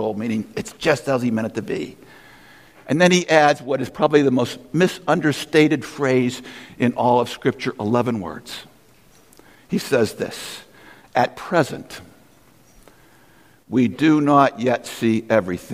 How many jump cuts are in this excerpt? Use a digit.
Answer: 0